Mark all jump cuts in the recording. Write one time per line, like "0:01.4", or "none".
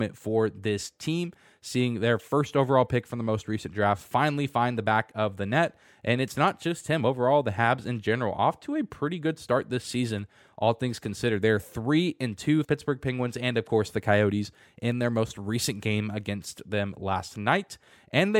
0:12.6